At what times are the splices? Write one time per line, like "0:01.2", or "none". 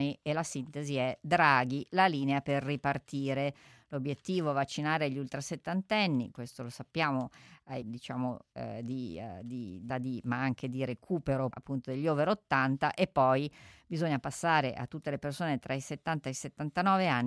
0:07.8
0:09.9
0:11.5